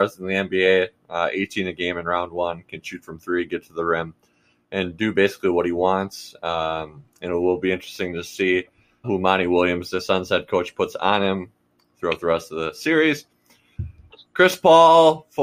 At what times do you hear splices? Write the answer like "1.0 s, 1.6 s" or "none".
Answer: 9.0 s